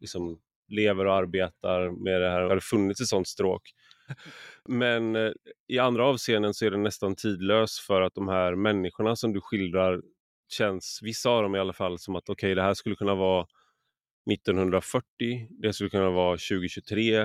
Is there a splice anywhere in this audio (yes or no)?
yes